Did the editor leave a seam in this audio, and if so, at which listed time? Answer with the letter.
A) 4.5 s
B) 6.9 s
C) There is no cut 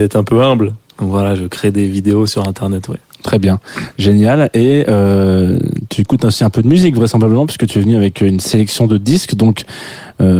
C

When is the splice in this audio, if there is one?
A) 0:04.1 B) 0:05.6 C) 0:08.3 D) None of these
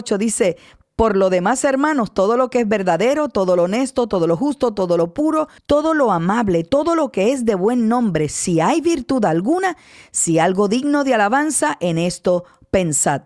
B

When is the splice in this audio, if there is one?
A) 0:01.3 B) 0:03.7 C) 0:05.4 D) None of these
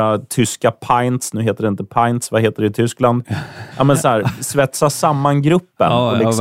B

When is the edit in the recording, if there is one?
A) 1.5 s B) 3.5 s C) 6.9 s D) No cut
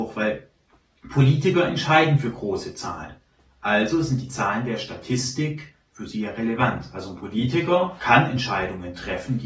D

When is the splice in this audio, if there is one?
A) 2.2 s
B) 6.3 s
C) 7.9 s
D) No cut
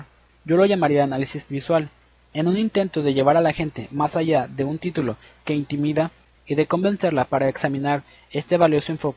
B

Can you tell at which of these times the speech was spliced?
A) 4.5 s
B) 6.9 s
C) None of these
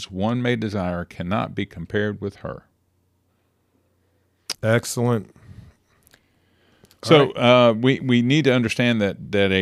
A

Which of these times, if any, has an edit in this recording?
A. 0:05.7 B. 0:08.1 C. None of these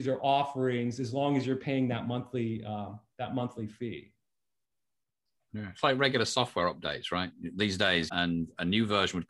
B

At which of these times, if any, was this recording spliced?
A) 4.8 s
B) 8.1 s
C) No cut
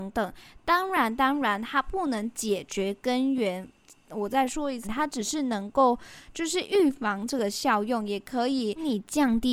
A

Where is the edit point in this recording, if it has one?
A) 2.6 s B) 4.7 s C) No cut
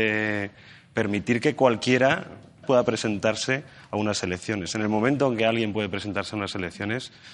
A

